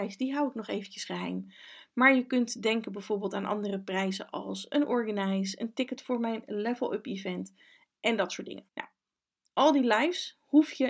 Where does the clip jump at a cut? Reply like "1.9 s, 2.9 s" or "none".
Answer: 8.7 s